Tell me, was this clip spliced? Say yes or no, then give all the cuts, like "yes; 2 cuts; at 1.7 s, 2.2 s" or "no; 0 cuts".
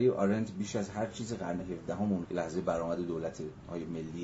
yes; 1 cut; at 2.2 s